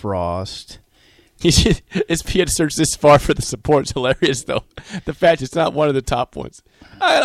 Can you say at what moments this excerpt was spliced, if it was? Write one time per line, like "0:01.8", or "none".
0:01.4